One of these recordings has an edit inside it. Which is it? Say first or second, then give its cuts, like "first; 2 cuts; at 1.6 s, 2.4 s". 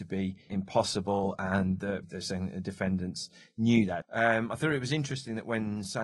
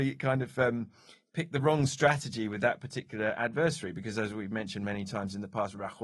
first; 2 cuts; at 2.0 s, 4.0 s